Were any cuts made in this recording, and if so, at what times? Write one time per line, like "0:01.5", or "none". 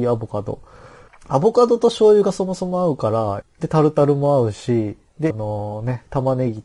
0:01.1
0:03.4
0:05.3